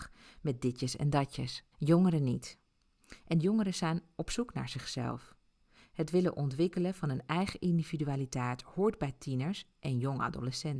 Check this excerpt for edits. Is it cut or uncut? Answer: cut